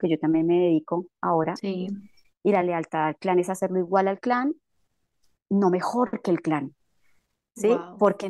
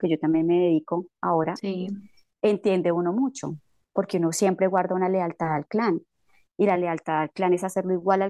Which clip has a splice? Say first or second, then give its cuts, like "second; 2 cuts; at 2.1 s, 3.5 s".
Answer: first; 2 cuts; at 2.2 s, 5.3 s